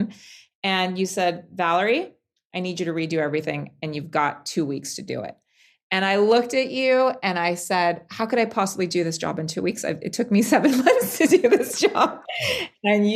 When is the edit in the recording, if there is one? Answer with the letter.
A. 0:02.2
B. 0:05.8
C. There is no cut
C